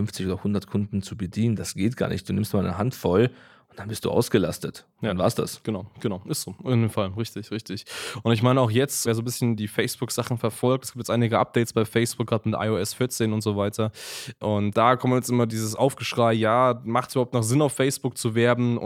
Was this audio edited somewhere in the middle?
no; 0 cuts

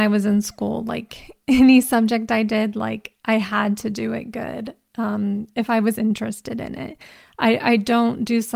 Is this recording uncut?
yes; 0 cuts

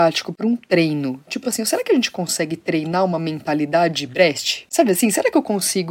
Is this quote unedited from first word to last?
yes; 0 cuts

